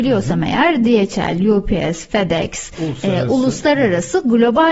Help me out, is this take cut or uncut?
uncut